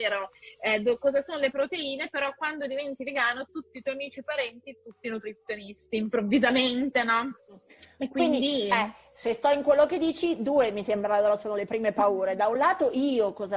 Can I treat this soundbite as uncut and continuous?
yes; 0 cuts

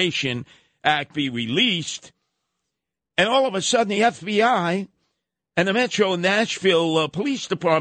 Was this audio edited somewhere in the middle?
no; 0 cuts

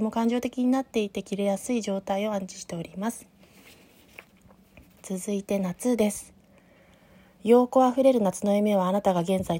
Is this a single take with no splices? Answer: yes; 0 cuts

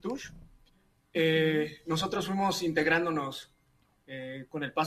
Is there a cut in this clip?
no; 0 cuts

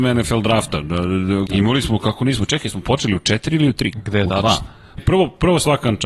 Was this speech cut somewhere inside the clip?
yes; 3 cuts; at 1.5 s, 3.9 s, 5.0 s

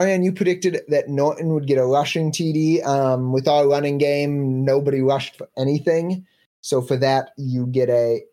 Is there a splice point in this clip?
no; 0 cuts

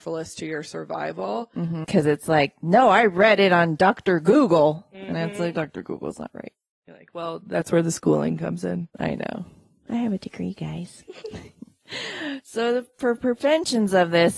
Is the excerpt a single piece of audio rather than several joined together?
no; 2 cuts; at 1.8 s, 5.5 s

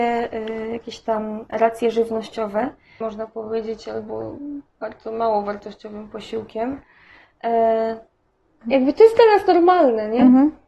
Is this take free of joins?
no; 2 cuts; at 3.0 s, 8.6 s

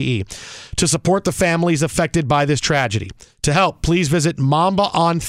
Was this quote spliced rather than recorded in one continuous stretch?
no; 0 cuts

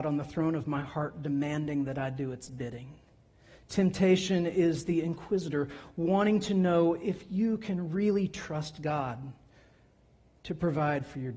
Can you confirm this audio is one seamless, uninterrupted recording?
yes; 0 cuts

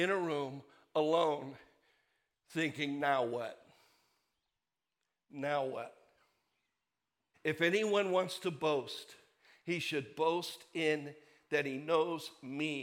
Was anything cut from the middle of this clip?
yes; 1 cut; at 7.3 s

